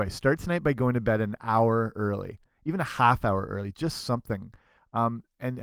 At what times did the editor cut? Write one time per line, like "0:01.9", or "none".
none